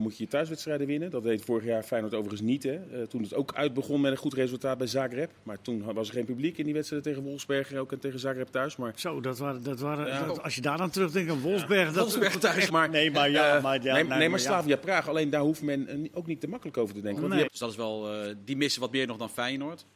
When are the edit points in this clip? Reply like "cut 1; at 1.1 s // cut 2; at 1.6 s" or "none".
cut 1; at 12.7 s // cut 2; at 17.4 s